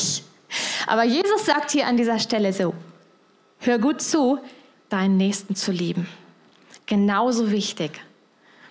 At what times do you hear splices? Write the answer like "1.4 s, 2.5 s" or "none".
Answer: 4.7 s